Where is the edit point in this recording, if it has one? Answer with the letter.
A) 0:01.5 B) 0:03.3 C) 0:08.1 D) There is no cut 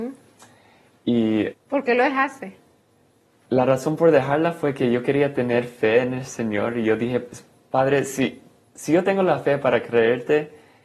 A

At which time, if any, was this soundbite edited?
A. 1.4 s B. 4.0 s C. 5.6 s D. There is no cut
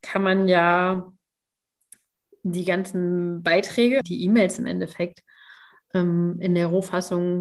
B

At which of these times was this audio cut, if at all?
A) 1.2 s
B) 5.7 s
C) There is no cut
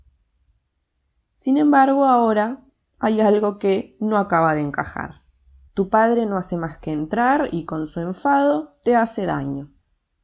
B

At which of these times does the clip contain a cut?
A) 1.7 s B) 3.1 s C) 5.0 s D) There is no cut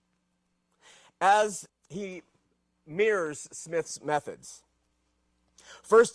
A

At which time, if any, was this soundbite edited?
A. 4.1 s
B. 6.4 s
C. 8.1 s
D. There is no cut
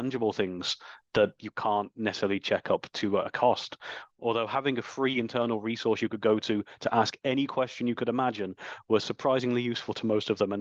D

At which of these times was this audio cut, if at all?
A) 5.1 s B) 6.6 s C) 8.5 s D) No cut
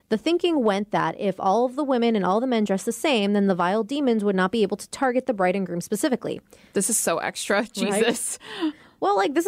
D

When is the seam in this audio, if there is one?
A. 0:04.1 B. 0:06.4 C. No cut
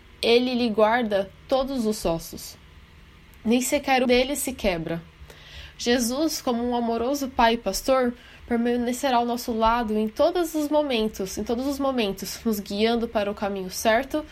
A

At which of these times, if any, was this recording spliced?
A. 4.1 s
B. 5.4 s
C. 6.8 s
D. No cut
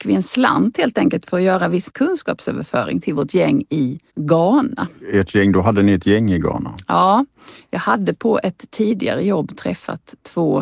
A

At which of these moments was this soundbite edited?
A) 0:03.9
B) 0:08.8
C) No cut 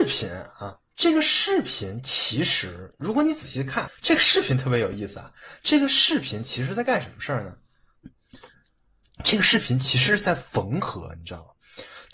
A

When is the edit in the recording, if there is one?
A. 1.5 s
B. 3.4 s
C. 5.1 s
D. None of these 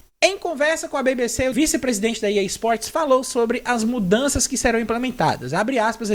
A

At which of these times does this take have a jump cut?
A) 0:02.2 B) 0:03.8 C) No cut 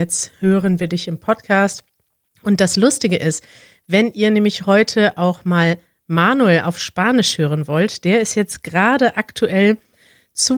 C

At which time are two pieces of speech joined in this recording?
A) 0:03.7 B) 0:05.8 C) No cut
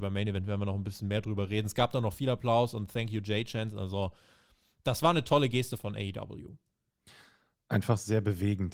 B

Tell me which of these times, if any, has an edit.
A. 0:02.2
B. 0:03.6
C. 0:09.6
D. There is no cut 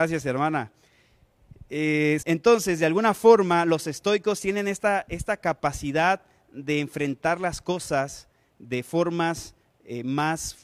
A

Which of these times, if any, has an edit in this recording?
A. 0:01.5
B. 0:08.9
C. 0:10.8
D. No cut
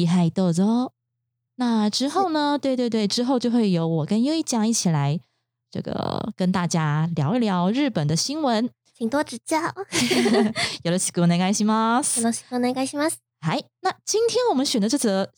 A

